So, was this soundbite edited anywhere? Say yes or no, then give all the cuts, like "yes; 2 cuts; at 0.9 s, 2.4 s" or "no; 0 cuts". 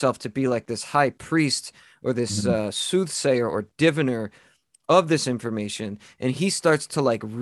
no; 0 cuts